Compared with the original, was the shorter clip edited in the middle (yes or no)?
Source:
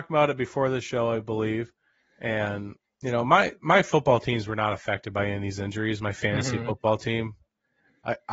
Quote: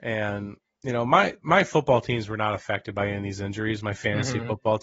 no